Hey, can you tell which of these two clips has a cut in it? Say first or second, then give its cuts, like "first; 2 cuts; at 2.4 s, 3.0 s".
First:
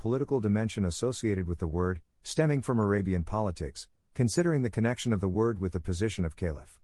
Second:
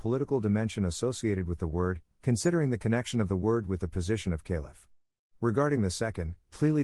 second; 1 cut; at 2.1 s